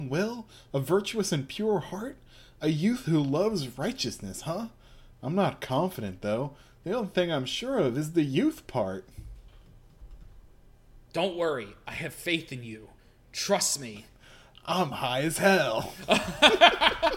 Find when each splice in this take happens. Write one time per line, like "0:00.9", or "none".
0:11.0